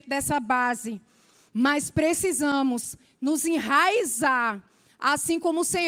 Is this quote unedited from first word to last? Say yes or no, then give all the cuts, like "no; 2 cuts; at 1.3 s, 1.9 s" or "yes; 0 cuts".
yes; 0 cuts